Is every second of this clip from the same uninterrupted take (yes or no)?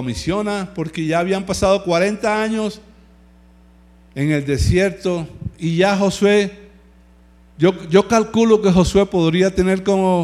yes